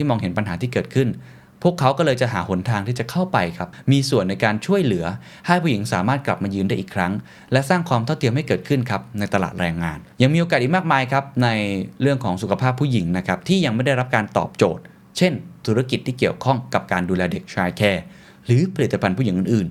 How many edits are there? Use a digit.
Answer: 1